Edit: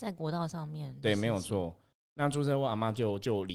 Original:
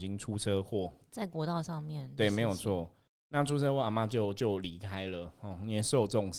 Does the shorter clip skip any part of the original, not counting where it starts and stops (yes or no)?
no